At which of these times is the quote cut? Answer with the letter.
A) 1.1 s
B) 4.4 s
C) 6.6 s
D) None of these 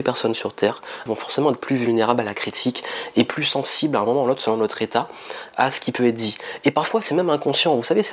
A